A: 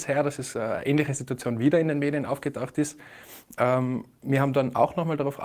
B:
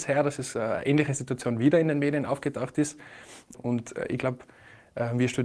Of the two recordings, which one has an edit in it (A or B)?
B